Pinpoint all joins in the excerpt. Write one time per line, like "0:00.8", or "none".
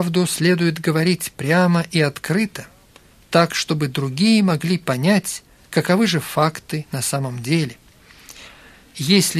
none

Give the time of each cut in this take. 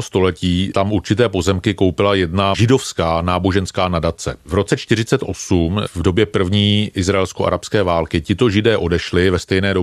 none

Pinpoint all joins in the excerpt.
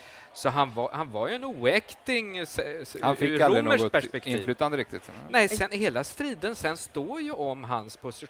none

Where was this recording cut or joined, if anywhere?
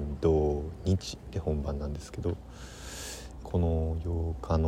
0:03.4

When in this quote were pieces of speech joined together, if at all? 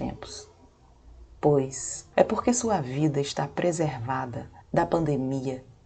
0:02.1
0:04.6

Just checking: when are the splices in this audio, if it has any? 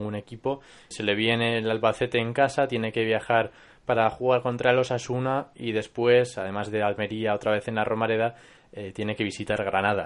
0:00.9

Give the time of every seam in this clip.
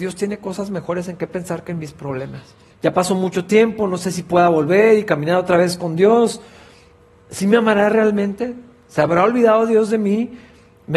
0:02.7

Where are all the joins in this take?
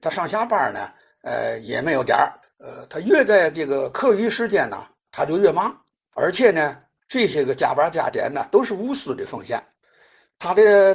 none

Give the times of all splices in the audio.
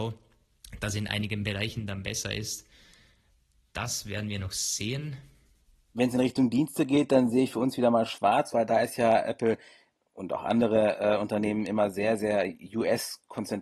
none

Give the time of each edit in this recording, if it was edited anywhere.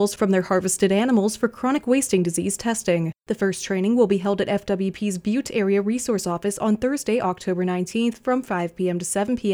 none

